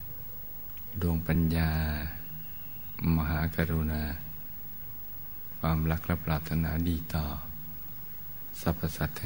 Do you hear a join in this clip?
no; 0 cuts

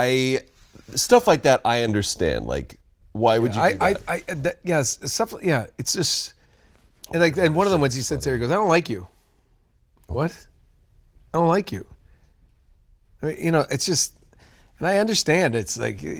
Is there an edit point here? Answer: no; 0 cuts

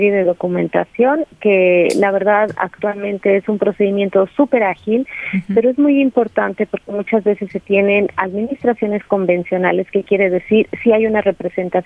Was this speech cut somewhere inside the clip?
no; 0 cuts

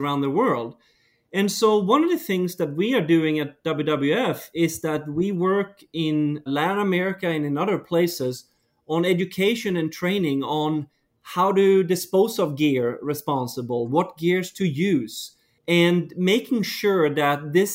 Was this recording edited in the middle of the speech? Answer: yes; 1 cut; at 6.5 s

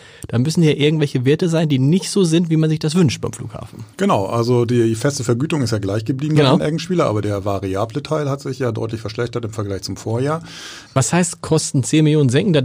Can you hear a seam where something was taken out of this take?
yes; 2 cuts; at 3.9 s, 10.9 s

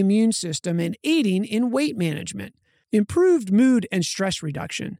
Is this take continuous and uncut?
no; 1 cut; at 2.8 s

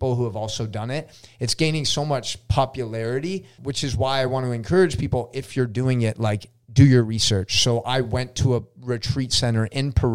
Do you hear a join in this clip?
yes; 1 cut; at 3.6 s

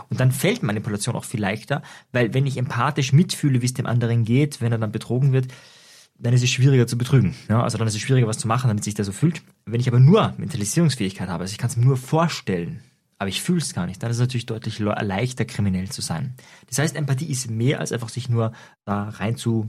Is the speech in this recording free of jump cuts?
yes; 0 cuts

